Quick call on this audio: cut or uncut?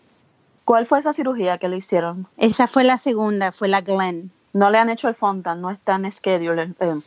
cut